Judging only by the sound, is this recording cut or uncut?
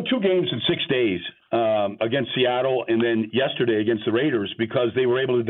cut